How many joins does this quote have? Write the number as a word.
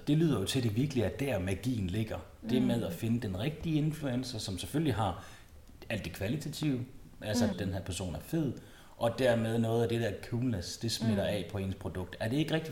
one